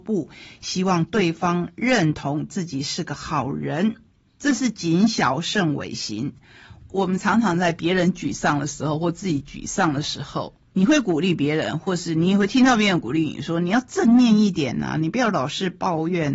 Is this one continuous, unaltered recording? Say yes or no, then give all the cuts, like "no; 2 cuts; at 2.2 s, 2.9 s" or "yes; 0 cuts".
no; 1 cut; at 6.8 s